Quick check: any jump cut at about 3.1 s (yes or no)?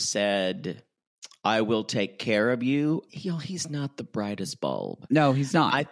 yes